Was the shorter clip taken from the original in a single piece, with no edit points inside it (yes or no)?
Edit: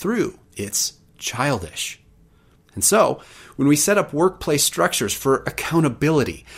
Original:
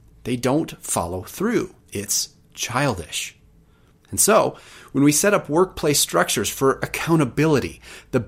yes